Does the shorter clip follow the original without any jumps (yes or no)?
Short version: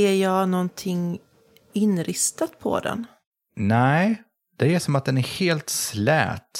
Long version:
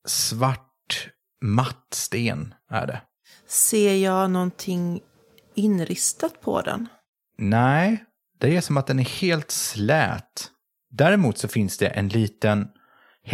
yes